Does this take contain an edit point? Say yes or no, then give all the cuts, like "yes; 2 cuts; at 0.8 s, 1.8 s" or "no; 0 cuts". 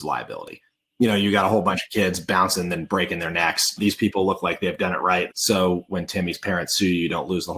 yes; 2 cuts; at 3.8 s, 5.3 s